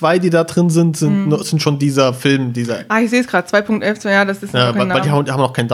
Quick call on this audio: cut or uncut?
uncut